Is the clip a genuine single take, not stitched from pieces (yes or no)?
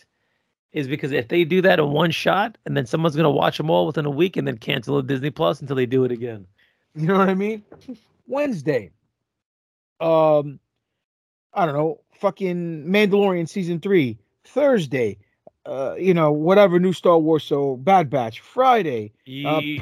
no